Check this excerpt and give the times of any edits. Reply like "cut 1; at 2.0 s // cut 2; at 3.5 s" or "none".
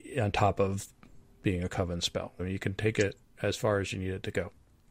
cut 1; at 2.4 s